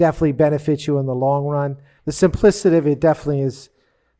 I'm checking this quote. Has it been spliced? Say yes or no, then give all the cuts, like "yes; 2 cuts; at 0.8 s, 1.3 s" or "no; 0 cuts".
yes; 1 cut; at 2.0 s